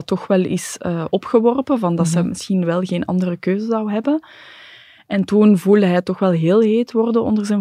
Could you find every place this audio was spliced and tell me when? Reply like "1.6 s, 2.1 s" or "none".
none